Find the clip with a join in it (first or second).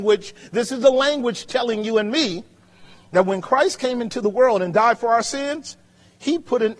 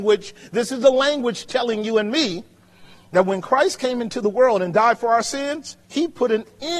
second